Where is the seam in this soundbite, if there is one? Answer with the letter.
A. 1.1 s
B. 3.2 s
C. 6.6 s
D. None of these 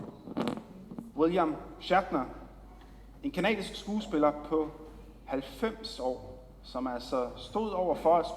A